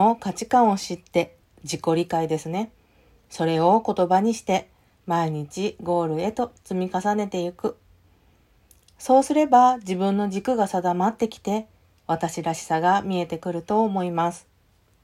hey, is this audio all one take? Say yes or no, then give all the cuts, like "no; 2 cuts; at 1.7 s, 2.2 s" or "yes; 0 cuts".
no; 1 cut; at 4.9 s